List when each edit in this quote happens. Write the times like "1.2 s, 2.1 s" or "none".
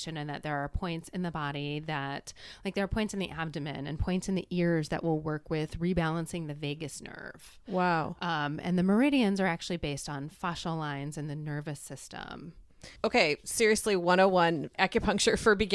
13.0 s, 14.7 s

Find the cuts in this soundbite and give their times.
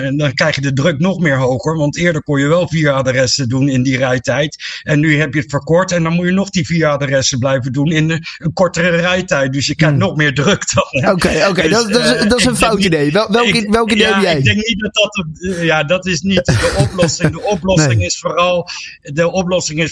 none

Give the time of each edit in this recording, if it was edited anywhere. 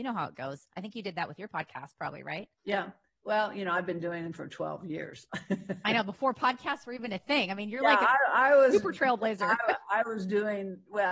2.6 s

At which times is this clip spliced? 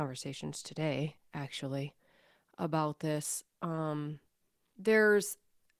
4.7 s

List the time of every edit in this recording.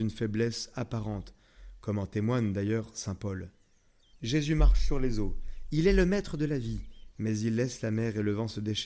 4.1 s, 7.1 s

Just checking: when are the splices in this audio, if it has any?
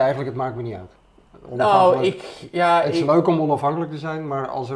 none

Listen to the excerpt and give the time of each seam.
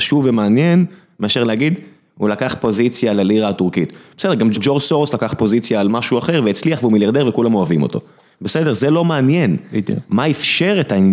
4.5 s

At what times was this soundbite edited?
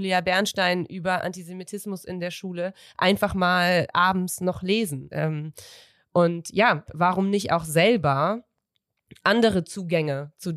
5.1 s, 6.9 s

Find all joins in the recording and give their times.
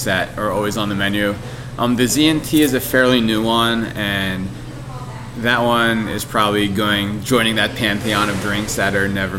none

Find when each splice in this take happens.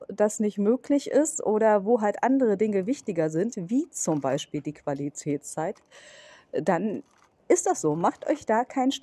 none

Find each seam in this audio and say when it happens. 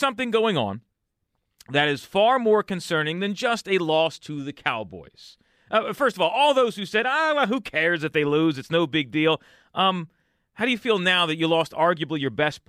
none

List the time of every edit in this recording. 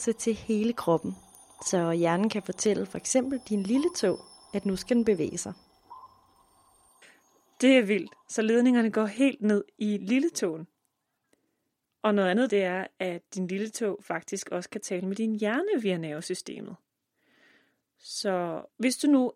12.5 s

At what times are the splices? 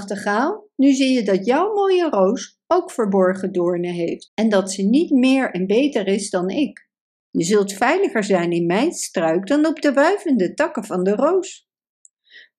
4.3 s, 7.2 s

